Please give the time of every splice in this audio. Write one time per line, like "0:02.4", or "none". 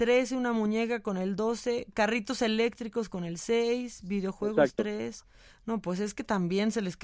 none